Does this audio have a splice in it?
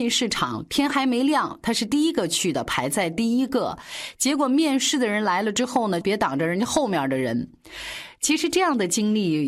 yes; 1 cut; at 6.0 s

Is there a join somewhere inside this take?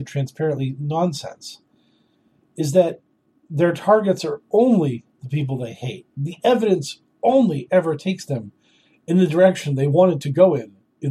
no; 0 cuts

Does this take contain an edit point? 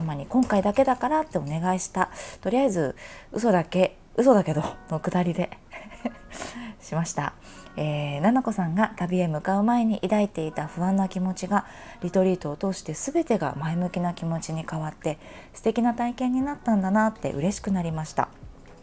no; 0 cuts

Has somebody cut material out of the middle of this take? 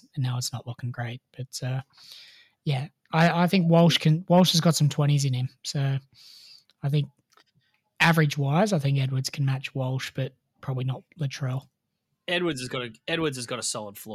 no; 0 cuts

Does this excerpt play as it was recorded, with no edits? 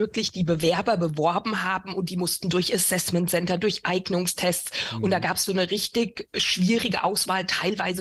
no; 1 cut; at 5.5 s

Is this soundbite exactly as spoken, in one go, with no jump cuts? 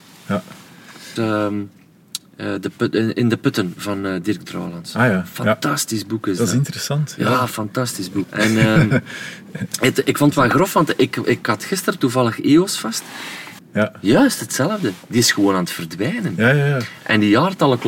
no; 3 cuts; at 1.2 s, 8.2 s, 13.6 s

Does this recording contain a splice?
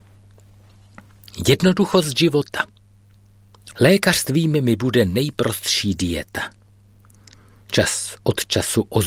yes; 1 cut; at 3.7 s

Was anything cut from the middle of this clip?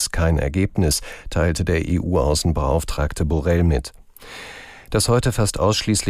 no; 0 cuts

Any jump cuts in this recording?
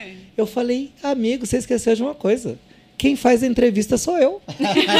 no; 0 cuts

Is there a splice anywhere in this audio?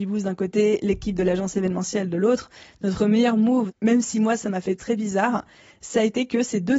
yes; 1 cut; at 3.7 s

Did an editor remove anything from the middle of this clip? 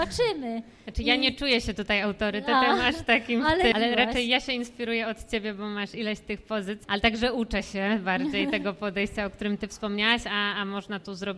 yes; 2 cuts; at 3.7 s, 6.8 s

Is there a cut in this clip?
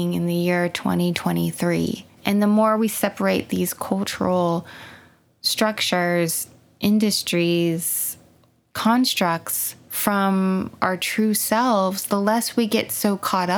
yes; 1 cut; at 2.1 s

